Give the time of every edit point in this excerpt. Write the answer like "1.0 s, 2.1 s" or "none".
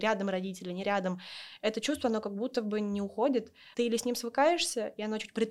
3.7 s